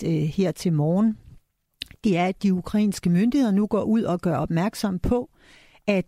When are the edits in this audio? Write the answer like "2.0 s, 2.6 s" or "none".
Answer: none